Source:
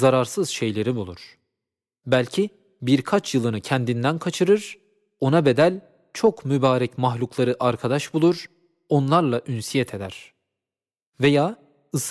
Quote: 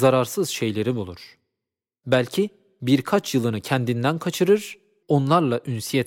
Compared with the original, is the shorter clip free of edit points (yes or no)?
no